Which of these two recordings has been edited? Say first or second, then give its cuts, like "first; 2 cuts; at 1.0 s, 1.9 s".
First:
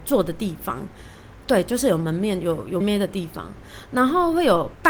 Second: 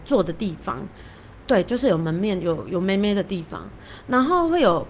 first; 1 cut; at 2.8 s